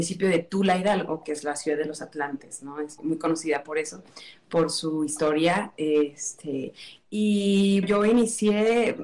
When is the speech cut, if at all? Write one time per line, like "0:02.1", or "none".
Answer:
0:03.0
0:07.8

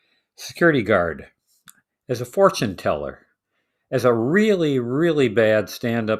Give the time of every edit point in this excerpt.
none

